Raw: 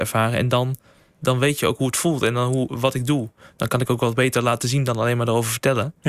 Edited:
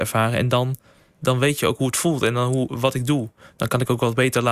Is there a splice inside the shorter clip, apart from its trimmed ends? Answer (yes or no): no